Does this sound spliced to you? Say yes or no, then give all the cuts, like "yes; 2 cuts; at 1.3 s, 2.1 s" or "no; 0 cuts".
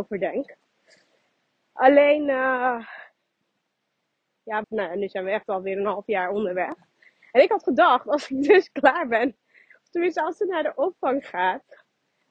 yes; 1 cut; at 4.6 s